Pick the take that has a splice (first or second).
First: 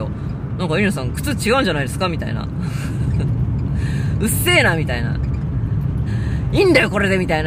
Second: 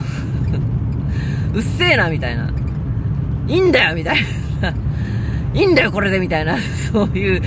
first